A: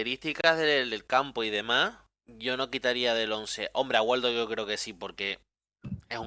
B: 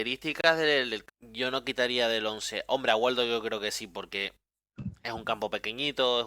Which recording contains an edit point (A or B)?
B